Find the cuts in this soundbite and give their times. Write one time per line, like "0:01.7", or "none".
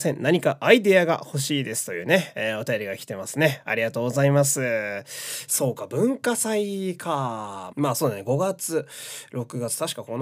0:07.7